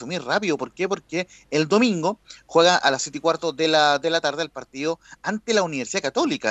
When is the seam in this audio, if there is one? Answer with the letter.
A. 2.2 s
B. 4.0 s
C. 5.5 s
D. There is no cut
D